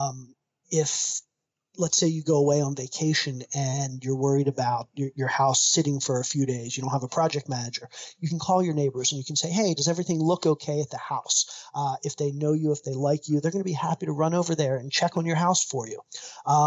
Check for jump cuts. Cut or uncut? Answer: uncut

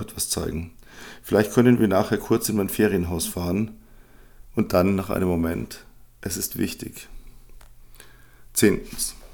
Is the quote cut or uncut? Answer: uncut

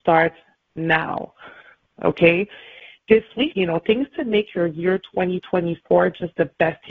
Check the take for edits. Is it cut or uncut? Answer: cut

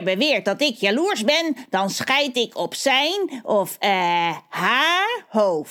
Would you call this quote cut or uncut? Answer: uncut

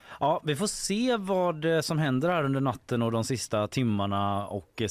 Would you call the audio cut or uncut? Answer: uncut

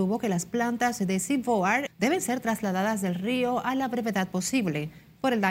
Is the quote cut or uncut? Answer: cut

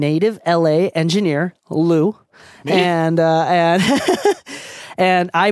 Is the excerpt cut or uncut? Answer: uncut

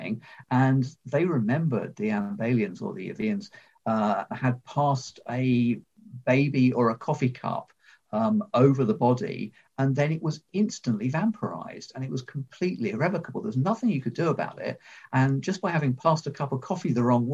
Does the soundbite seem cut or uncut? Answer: cut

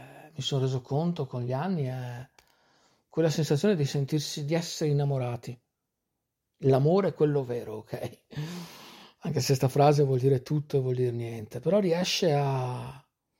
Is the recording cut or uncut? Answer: uncut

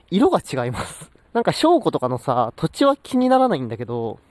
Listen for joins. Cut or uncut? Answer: cut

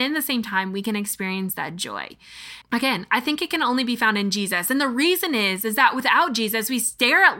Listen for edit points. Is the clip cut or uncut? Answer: cut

